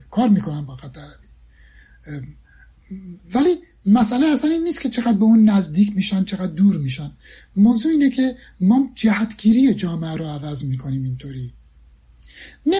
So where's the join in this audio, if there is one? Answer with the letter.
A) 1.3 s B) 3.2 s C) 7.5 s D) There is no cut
B